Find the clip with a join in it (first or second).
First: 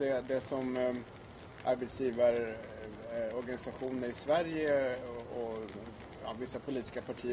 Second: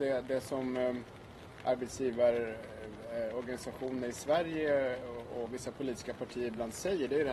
second